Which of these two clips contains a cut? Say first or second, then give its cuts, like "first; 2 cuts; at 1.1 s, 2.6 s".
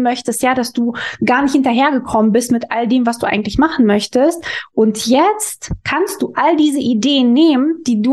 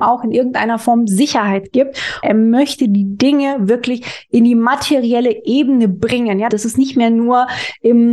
second; 2 cuts; at 2.2 s, 6.5 s